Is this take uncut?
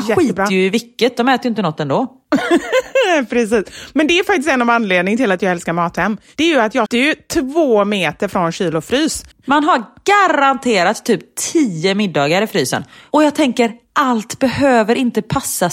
no; 2 cuts; at 6.9 s, 9.3 s

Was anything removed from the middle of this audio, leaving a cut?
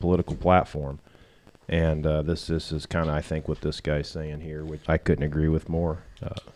yes; 1 cut; at 4.9 s

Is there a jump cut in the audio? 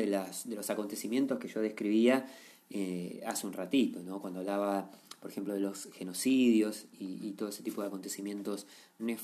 no; 0 cuts

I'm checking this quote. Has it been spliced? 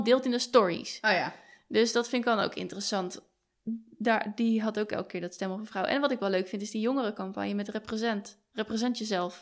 no; 0 cuts

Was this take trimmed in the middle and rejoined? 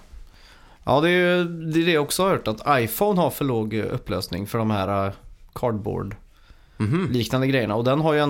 no; 0 cuts

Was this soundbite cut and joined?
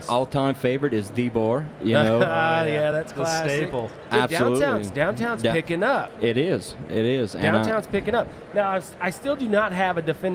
no; 0 cuts

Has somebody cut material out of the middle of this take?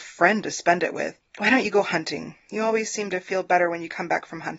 no; 0 cuts

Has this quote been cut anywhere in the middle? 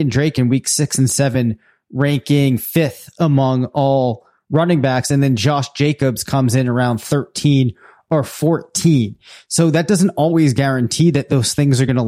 no; 0 cuts

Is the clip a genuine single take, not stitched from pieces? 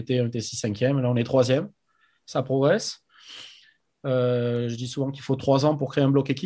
yes; 0 cuts

